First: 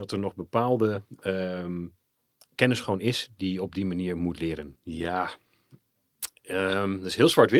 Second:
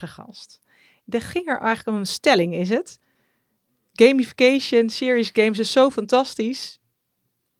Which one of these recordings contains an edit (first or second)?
first